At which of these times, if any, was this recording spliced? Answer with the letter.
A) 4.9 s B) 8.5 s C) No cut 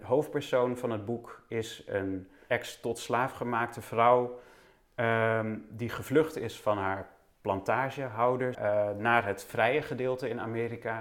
B